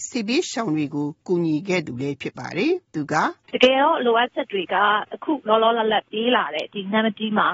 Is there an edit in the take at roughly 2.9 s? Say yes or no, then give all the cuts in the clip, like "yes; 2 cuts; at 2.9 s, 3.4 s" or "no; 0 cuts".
yes; 1 cut; at 2.9 s